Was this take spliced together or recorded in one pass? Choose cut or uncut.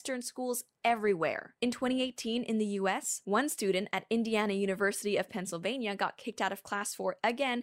uncut